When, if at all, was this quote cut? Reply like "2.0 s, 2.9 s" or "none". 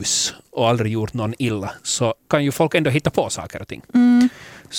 2.2 s